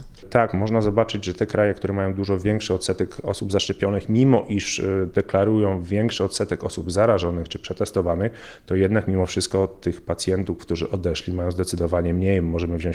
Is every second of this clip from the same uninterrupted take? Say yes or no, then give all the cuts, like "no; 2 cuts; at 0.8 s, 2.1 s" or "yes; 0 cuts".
yes; 0 cuts